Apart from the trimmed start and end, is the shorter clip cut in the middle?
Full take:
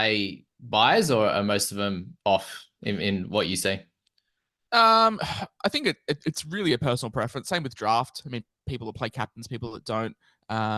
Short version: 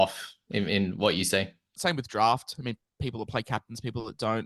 yes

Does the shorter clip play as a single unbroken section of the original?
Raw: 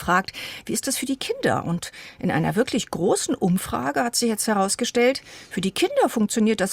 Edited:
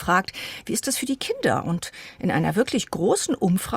yes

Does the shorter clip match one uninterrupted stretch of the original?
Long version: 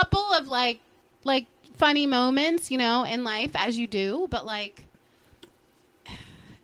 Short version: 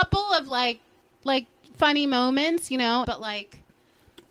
no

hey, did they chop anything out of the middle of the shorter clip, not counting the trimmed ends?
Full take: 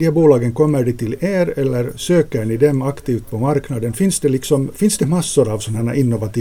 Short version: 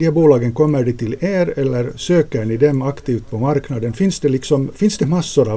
no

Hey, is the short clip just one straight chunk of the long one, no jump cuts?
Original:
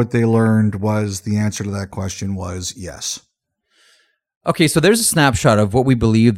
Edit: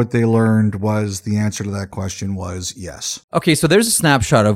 no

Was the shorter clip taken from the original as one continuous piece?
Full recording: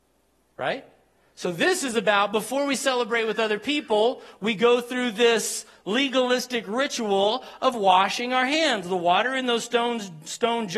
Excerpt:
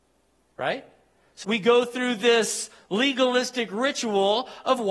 no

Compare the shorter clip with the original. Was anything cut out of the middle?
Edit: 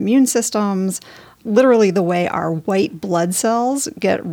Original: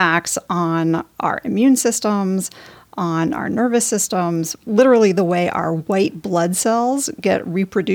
yes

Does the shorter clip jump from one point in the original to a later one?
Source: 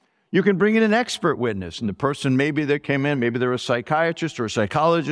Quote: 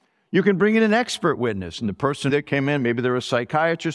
yes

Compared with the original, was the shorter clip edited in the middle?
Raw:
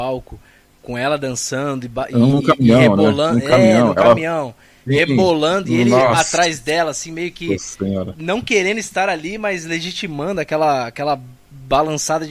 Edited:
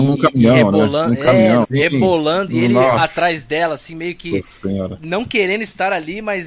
yes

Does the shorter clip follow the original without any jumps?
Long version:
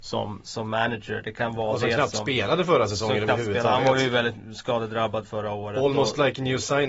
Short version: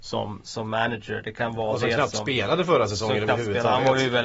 yes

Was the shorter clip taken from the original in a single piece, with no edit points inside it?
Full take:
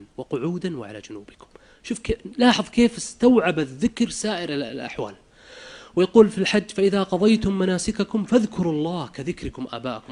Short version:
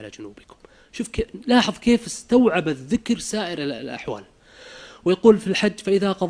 yes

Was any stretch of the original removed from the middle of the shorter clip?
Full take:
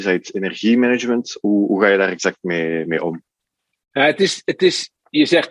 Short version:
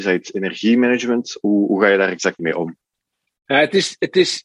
yes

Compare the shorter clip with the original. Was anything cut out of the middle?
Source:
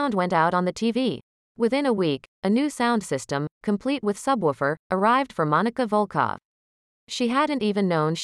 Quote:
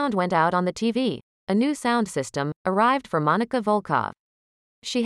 yes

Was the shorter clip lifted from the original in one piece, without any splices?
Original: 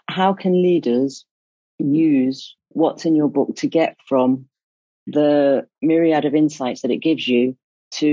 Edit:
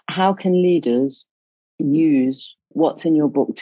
yes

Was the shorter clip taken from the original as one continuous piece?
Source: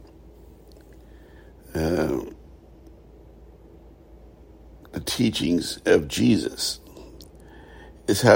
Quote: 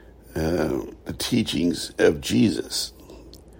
no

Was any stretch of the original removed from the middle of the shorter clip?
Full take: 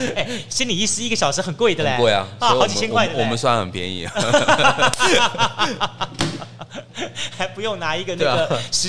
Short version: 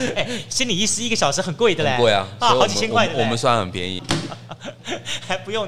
yes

